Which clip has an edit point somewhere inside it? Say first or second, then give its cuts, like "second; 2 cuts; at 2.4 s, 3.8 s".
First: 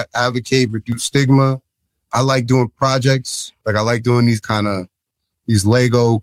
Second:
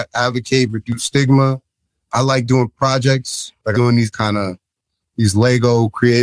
second; 1 cut; at 3.7 s